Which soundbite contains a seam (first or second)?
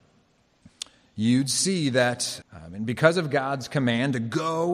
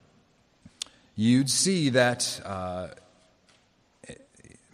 first